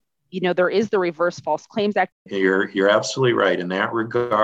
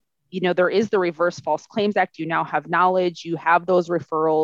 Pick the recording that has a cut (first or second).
first